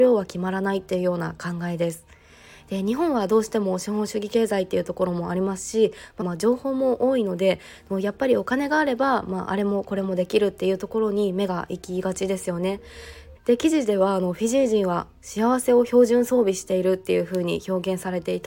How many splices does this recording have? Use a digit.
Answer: 2